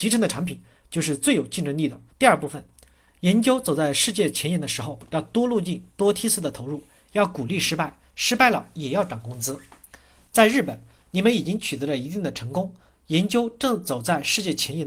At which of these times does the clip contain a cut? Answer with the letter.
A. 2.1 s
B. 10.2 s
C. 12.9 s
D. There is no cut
A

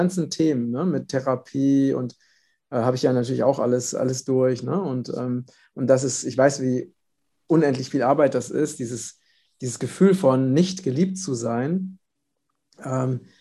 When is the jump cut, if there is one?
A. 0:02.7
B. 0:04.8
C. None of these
C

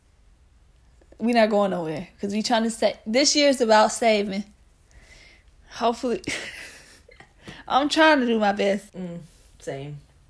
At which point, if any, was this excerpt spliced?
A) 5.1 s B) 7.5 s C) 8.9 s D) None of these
C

